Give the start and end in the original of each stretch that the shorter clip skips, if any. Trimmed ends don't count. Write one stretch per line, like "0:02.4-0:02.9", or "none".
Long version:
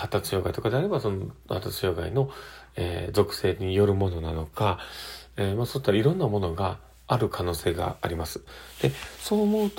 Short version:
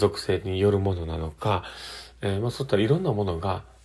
none